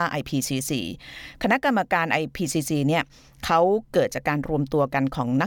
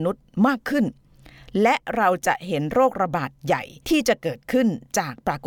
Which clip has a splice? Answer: second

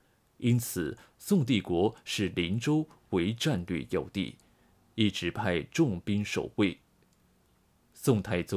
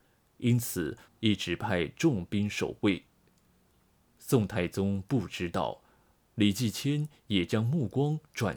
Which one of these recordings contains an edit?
second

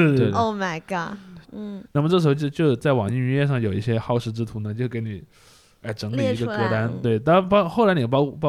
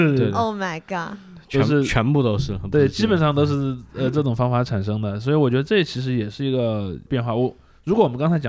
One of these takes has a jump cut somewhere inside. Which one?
first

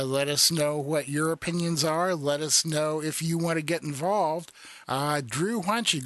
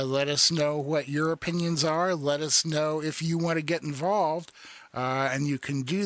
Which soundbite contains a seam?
first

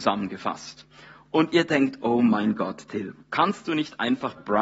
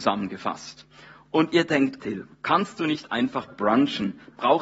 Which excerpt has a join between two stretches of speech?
second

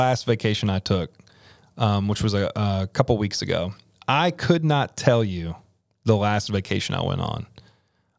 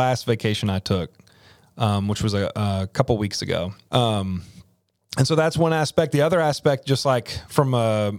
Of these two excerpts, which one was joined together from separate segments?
second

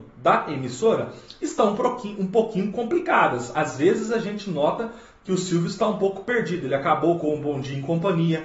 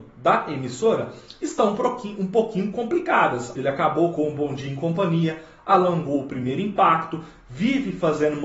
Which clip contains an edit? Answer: second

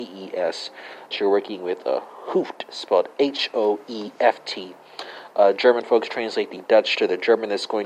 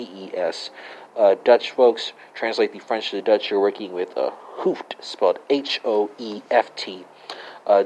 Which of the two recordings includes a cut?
first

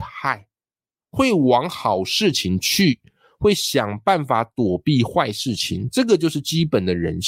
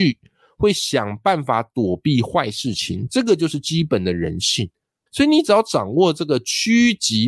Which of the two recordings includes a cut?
second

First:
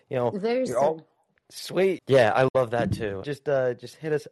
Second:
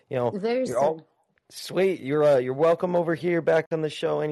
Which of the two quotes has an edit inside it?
first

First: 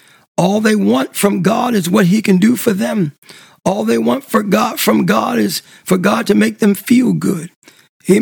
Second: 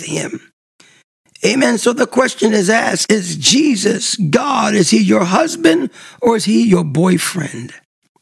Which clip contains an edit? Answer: second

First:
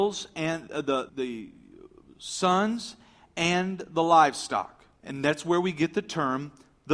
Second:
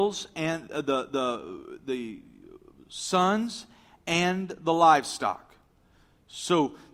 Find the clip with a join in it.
first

